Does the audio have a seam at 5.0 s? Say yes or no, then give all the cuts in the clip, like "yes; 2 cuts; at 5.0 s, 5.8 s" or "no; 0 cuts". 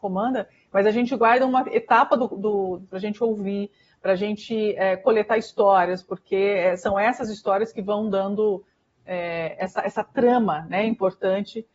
no; 1 cut; at 2.9 s